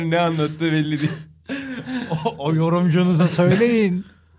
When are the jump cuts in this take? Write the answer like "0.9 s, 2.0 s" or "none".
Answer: none